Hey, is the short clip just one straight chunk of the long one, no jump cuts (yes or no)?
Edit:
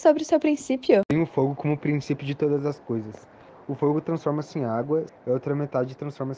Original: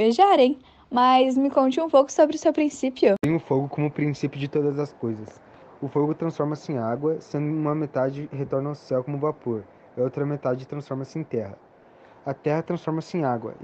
no